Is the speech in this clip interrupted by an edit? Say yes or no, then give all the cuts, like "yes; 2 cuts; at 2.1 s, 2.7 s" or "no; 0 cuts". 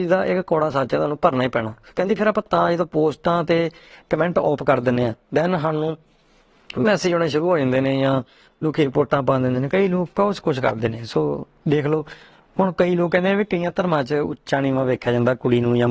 no; 0 cuts